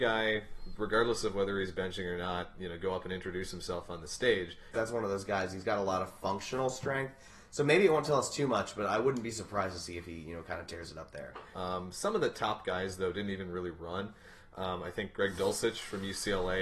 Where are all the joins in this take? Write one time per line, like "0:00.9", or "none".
0:04.7
0:11.5